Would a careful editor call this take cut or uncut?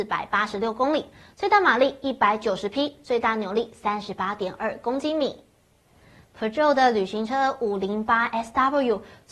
uncut